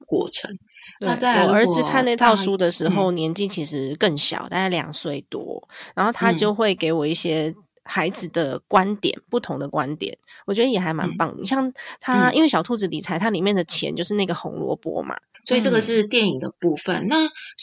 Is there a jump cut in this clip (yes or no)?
yes